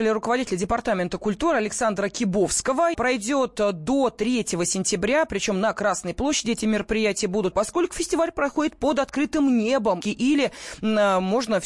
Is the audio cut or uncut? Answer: cut